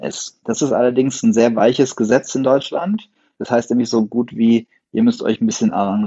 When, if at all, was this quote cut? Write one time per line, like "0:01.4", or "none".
none